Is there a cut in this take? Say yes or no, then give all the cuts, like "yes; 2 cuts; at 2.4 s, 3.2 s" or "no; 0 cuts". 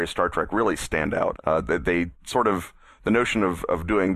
yes; 1 cut; at 1.4 s